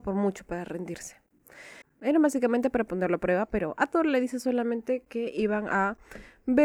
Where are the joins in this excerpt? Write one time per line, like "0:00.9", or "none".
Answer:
0:01.8